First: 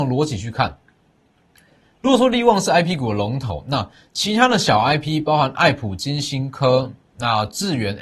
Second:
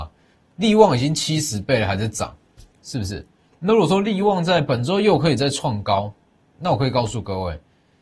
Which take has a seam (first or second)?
second